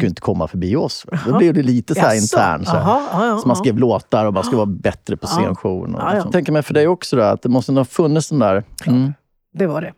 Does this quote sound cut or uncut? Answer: cut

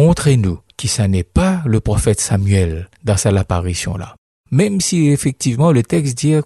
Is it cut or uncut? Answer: uncut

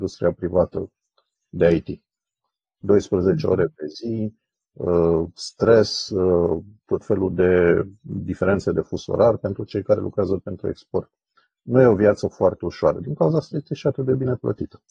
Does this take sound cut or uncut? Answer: uncut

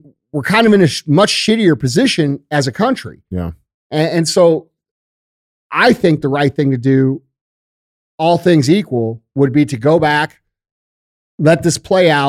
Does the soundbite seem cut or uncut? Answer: uncut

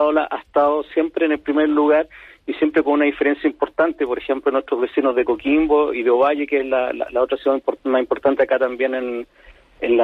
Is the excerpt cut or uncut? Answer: uncut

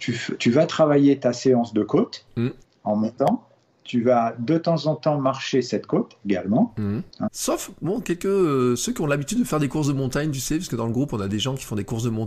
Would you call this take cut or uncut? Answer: cut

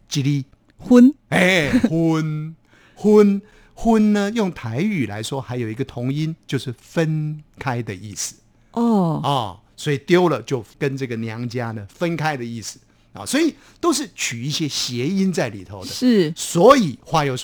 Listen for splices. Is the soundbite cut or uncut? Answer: uncut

